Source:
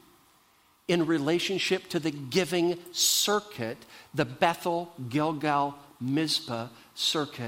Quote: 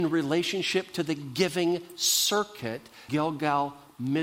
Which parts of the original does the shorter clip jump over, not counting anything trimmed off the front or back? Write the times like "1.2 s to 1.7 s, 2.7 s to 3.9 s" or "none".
4.0 s to 5.1 s